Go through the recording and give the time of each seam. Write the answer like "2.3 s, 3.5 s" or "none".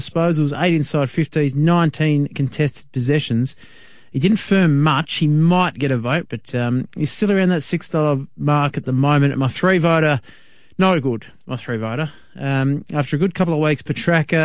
6.2 s

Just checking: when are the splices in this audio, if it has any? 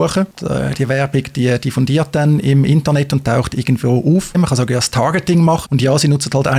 4.3 s, 5.7 s

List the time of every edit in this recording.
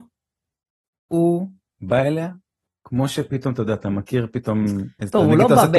none

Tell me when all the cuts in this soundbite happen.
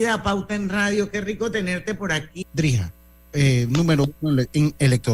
2.4 s

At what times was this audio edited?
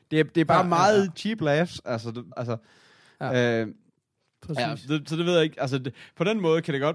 1.1 s, 2.3 s

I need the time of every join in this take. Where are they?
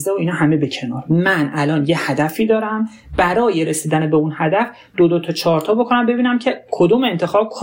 none

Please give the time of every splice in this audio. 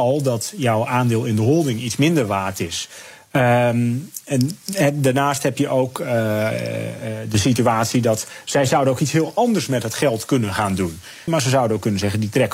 11.3 s

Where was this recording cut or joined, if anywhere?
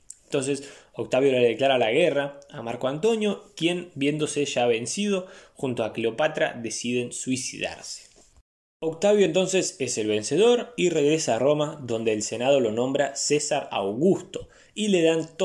none

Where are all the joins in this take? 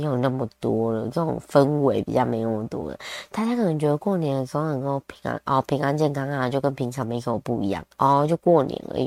7.9 s

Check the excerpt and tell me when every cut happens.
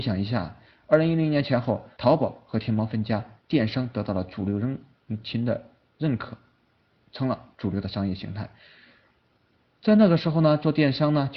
2.0 s

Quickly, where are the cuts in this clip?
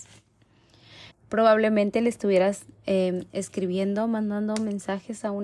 1.1 s

